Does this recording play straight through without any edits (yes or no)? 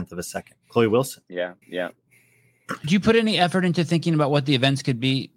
no